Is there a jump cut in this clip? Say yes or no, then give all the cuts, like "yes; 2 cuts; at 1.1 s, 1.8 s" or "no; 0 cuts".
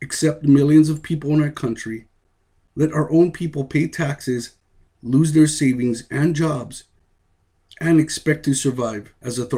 no; 0 cuts